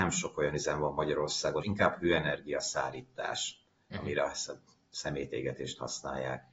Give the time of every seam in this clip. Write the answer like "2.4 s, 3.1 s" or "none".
1.6 s